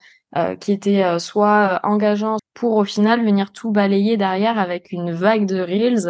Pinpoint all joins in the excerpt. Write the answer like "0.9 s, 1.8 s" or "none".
2.4 s